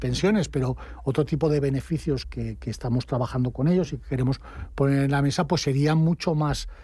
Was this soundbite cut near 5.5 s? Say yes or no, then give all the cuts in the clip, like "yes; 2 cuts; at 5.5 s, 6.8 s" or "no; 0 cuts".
no; 1 cut; at 2.2 s